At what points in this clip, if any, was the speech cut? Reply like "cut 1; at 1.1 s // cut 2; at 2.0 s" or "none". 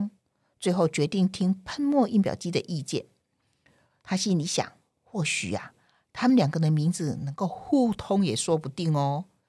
none